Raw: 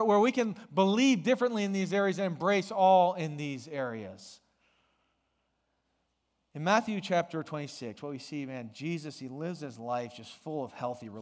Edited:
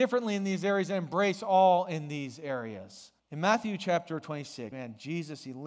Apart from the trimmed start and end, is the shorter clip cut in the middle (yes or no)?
yes